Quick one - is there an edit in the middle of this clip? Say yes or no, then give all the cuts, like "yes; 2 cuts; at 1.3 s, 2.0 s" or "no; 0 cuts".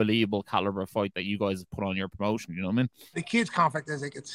yes; 1 cut; at 3.1 s